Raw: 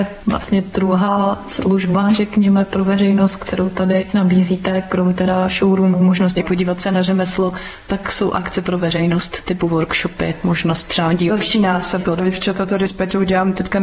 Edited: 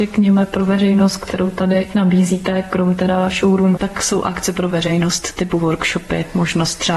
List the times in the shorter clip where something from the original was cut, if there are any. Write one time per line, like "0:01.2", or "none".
0:03.8